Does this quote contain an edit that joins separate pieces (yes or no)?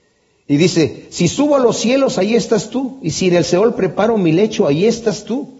no